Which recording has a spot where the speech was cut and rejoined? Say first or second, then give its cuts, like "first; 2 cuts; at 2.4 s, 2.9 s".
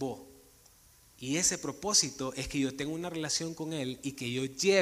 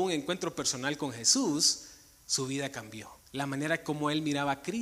second; 1 cut; at 3.2 s